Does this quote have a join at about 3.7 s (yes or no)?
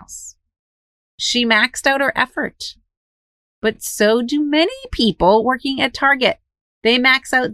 no